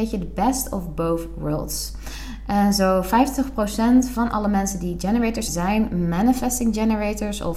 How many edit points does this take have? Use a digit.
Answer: 1